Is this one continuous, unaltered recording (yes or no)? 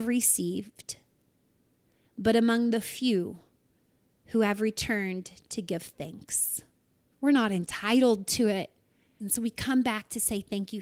no